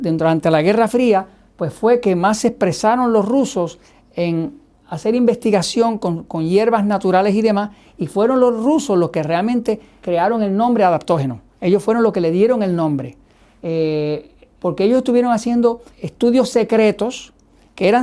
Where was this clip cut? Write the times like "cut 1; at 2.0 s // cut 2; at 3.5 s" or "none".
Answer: cut 1; at 10.0 s // cut 2; at 14.6 s // cut 3; at 15.9 s